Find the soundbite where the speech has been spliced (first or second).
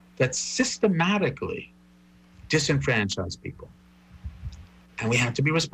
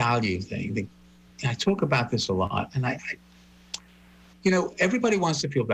second